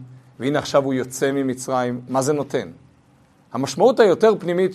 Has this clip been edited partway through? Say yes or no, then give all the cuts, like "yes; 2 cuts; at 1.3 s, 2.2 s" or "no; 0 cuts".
no; 0 cuts